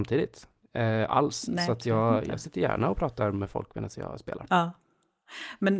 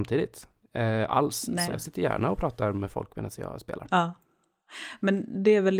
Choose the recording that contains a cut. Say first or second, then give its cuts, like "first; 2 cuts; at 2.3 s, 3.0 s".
second; 1 cut; at 1.7 s